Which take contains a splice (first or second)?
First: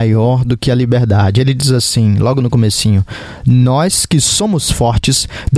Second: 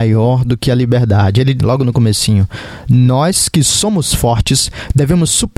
second